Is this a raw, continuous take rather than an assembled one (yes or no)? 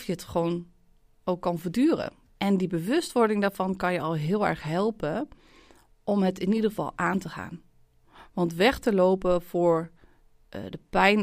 no